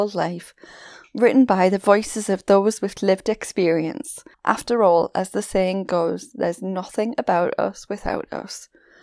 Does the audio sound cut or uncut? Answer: cut